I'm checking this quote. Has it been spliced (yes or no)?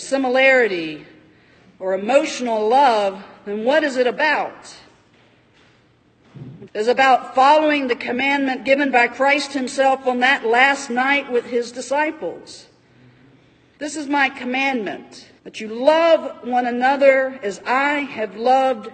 yes